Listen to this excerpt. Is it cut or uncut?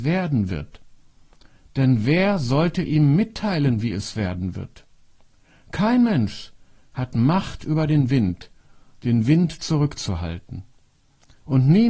uncut